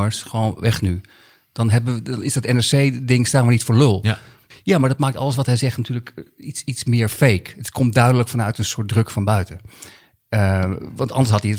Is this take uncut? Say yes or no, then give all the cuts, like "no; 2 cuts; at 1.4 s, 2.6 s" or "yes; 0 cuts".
yes; 0 cuts